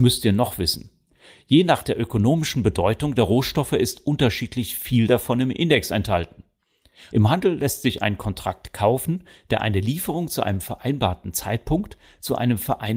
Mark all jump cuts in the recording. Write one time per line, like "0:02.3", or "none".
0:07.1